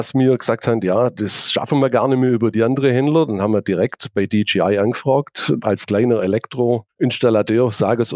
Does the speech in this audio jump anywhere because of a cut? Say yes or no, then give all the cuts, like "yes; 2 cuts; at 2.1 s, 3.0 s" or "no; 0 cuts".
yes; 1 cut; at 5.6 s